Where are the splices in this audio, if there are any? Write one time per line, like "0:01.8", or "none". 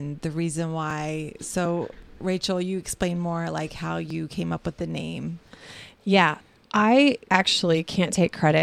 none